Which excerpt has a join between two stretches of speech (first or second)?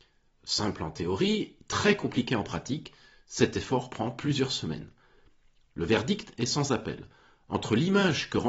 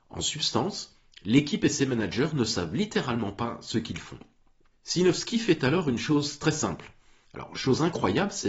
second